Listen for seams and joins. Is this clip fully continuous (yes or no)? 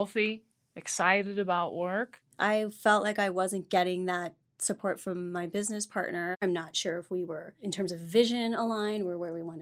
yes